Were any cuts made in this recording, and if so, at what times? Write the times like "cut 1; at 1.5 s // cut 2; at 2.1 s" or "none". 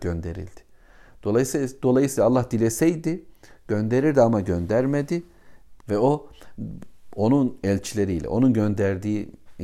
cut 1; at 5.8 s